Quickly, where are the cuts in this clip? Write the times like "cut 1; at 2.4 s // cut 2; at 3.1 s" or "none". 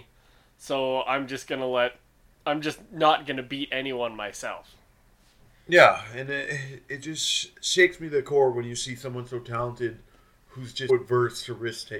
cut 1; at 10.9 s